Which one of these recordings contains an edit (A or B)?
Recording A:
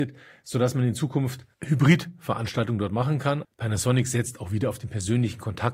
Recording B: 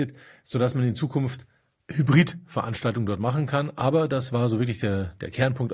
A